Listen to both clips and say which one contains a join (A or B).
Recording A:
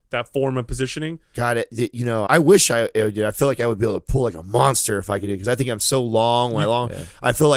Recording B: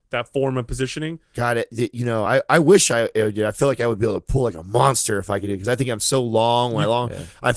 A